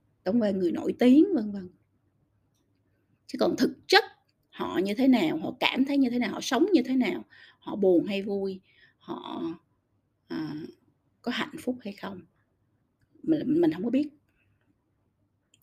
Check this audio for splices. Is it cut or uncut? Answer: uncut